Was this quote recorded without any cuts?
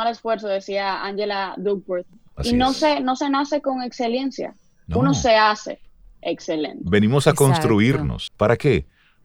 no; 1 cut; at 8.3 s

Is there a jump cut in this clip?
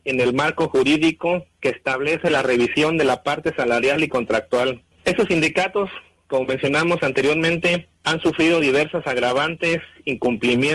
yes; 1 cut; at 4.9 s

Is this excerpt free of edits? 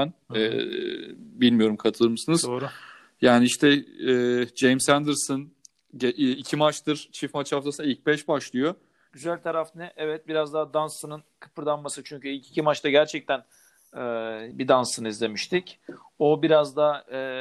no; 2 cuts; at 9.1 s, 14.5 s

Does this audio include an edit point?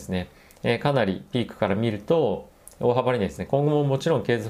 yes; 1 cut; at 3.5 s

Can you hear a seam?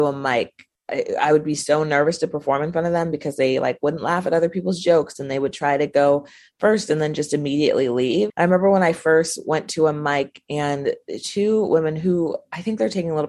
yes; 1 cut; at 8.3 s

